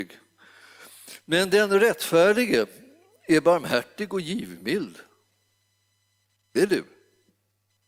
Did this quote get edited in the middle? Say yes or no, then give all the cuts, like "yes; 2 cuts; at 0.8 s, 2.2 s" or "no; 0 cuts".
no; 0 cuts